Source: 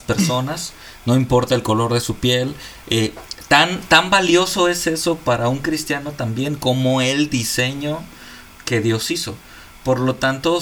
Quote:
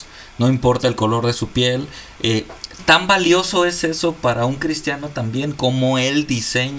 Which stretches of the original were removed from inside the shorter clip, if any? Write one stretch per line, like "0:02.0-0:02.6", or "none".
0:03.5-0:03.8